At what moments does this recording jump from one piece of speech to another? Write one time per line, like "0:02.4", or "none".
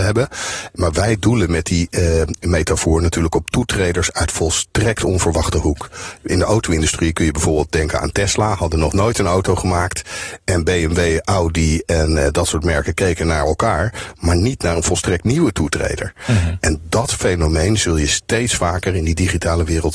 none